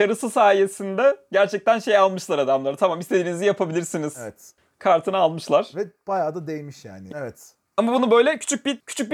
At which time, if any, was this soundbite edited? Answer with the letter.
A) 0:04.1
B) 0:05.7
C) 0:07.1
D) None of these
C